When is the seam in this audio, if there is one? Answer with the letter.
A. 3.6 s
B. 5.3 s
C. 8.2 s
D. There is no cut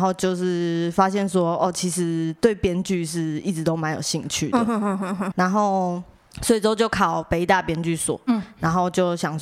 B